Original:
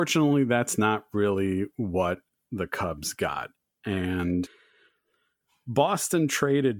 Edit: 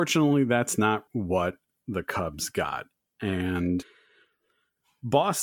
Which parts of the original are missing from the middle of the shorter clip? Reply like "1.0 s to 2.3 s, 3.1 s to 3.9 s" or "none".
1.1 s to 1.7 s